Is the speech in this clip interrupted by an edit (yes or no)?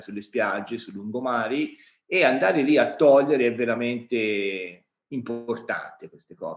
no